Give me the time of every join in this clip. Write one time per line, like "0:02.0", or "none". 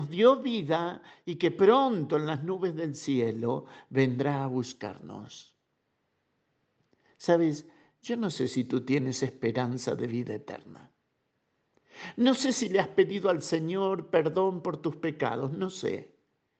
none